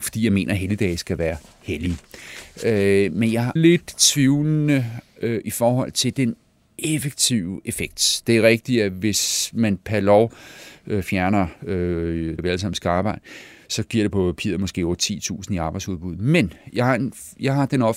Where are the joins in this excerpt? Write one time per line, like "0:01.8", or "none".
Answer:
0:03.6
0:12.4

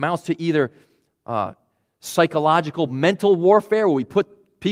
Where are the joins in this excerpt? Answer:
none

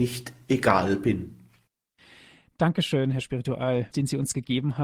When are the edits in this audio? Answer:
0:03.9

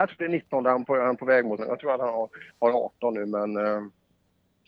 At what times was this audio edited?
0:01.6

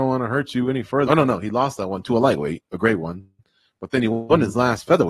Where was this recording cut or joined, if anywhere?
0:01.1

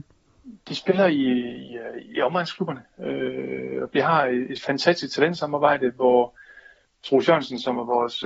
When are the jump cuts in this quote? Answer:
none

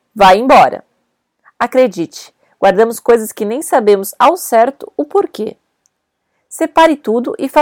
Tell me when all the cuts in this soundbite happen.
0:01.4

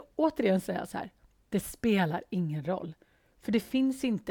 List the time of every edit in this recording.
none

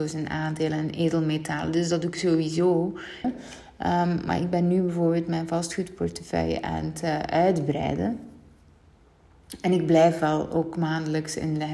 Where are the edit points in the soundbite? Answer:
0:03.2

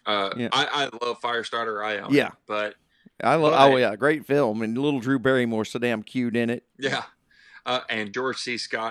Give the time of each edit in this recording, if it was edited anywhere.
0:06.7

